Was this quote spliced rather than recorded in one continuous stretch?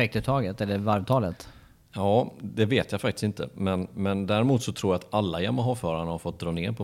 no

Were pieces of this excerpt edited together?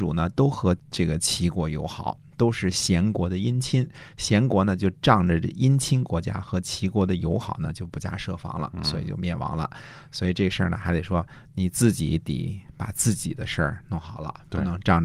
no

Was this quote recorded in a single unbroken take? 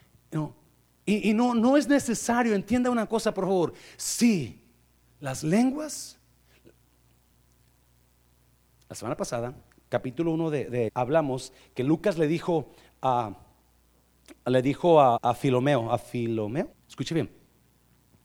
no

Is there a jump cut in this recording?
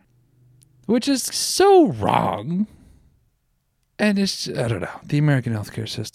yes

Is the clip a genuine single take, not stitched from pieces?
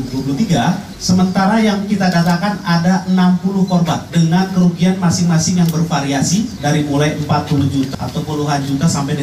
no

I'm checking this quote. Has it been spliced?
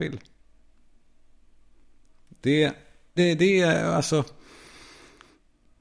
yes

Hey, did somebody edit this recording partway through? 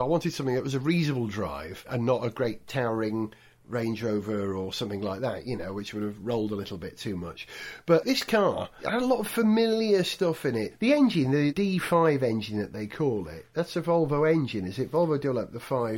no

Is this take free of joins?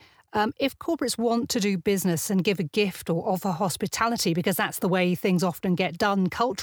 yes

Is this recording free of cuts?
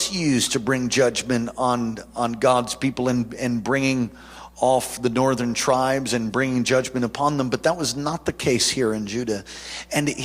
yes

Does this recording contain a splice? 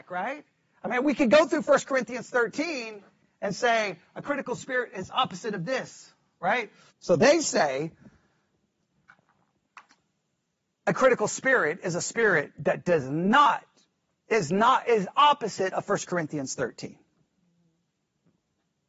yes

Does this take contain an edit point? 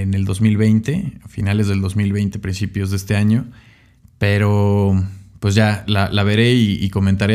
yes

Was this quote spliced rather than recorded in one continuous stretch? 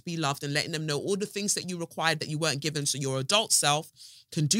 no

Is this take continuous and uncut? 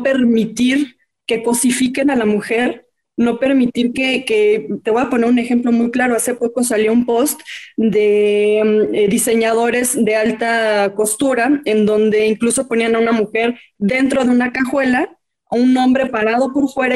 yes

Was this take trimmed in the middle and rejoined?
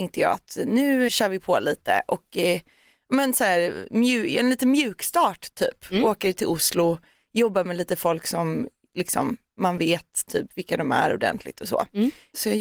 yes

